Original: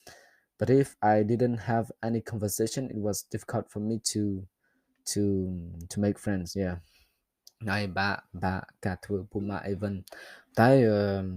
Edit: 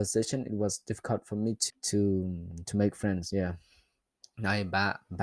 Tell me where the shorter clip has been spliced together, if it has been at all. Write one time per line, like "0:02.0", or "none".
0:01.7